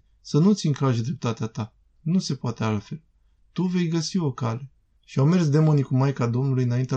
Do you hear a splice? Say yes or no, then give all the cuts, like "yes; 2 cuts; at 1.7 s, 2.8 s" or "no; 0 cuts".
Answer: yes; 2 cuts; at 2.0 s, 5.0 s